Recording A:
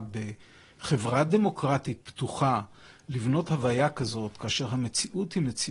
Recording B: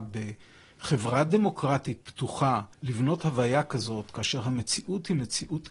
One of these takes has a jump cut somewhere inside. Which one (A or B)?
B